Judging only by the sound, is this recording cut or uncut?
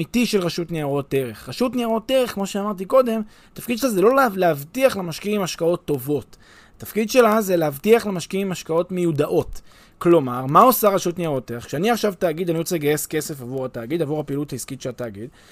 uncut